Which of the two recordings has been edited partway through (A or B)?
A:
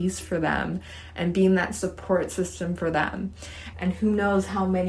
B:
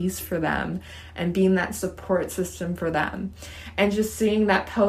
A